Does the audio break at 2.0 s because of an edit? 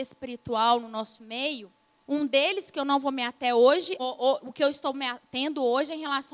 yes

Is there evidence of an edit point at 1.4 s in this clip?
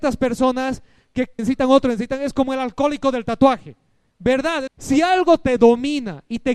yes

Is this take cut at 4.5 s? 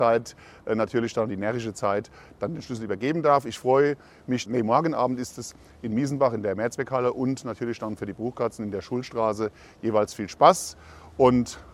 yes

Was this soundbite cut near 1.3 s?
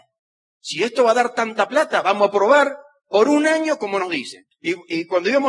no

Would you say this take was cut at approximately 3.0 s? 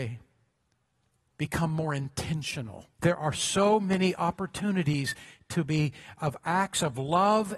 yes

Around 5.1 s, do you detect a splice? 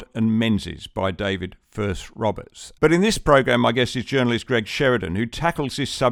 no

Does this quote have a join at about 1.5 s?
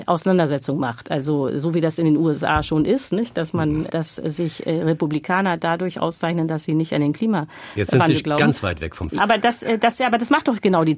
no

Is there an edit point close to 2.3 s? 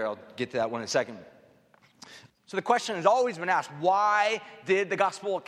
yes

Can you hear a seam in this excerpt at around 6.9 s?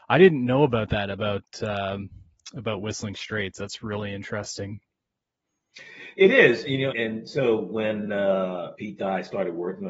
yes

